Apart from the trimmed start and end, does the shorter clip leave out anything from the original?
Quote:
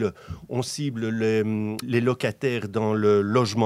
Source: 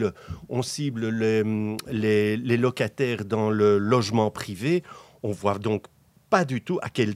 yes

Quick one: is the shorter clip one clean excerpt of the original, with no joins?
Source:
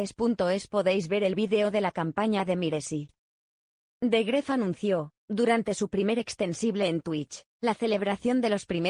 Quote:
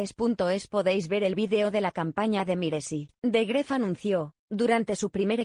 no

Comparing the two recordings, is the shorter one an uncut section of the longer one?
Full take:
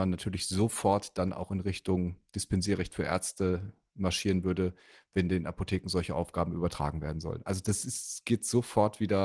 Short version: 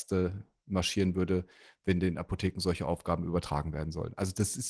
yes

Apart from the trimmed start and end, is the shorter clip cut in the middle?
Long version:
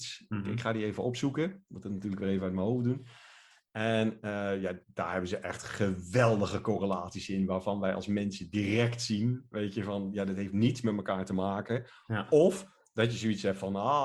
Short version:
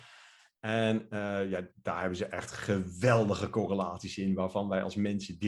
no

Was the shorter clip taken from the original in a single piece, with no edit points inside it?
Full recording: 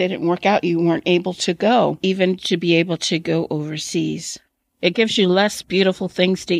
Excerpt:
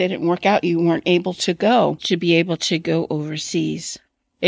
no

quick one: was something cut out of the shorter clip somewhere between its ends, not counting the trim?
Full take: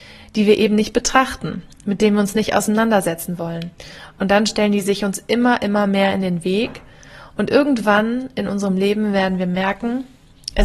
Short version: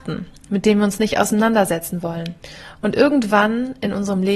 yes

